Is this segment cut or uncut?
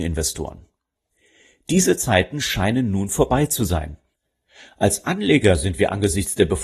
uncut